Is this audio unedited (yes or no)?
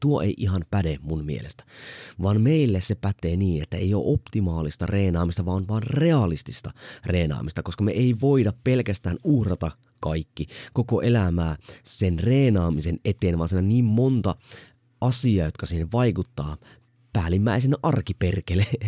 yes